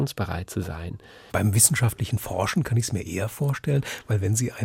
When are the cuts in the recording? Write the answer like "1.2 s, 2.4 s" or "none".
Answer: 1.3 s